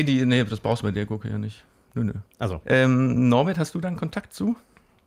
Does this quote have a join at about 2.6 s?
yes; 1 cut; at 2.6 s

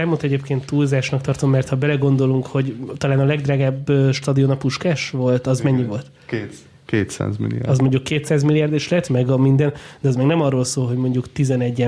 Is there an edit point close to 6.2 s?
no; 1 cut; at 9.1 s

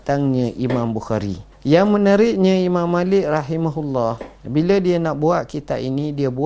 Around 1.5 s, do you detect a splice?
yes; 1 cut; at 1.5 s

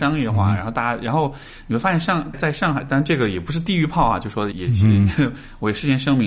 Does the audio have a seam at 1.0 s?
no; 2 cuts; at 2.3 s, 4.5 s

